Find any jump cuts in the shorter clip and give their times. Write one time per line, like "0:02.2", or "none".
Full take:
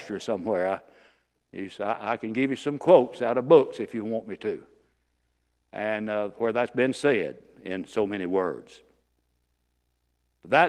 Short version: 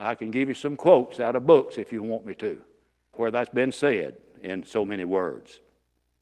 0:03.1